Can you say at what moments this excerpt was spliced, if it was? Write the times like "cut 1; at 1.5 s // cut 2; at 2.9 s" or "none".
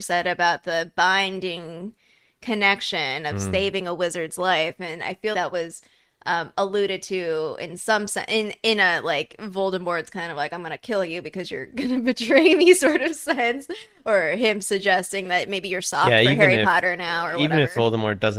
cut 1; at 5.3 s